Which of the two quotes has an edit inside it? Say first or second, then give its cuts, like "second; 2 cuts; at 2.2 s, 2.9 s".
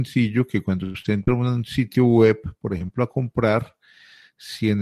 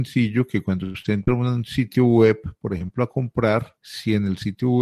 second; 1 cut; at 3.8 s